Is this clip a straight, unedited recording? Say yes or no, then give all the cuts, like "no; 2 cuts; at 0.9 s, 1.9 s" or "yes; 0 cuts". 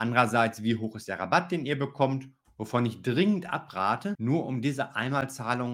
no; 2 cuts; at 2.4 s, 4.1 s